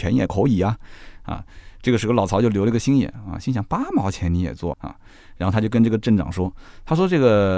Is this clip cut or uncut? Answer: cut